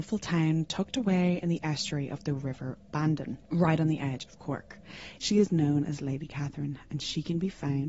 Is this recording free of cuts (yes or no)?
no